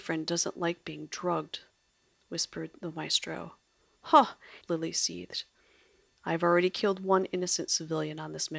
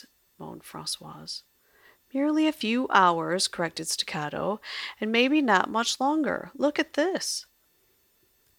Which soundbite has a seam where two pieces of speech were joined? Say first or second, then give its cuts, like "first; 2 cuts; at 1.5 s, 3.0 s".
first; 1 cut; at 4.6 s